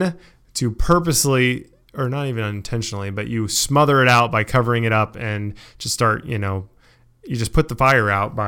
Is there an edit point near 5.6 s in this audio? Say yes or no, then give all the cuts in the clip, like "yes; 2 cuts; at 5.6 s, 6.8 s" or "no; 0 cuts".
no; 0 cuts